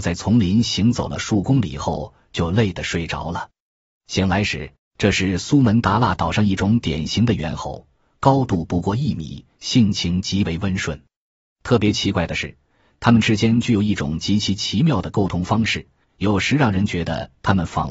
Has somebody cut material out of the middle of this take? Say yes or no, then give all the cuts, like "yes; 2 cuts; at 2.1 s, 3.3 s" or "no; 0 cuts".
yes; 2 cuts; at 4.8 s, 16.0 s